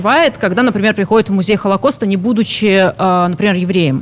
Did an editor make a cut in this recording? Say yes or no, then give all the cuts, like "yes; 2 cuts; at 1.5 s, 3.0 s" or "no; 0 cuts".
no; 0 cuts